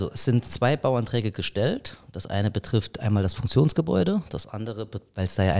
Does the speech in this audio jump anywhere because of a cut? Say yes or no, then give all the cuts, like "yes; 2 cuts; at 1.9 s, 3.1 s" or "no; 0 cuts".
no; 0 cuts